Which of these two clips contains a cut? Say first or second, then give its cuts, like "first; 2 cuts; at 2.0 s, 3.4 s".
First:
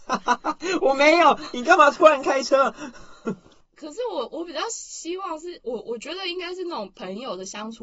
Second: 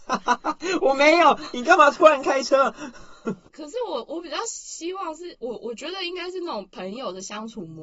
second; 1 cut; at 3.5 s